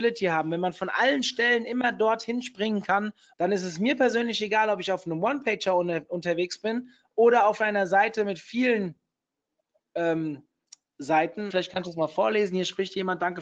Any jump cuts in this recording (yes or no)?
yes